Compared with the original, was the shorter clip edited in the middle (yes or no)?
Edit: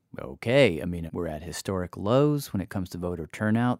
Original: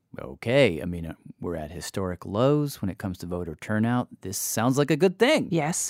yes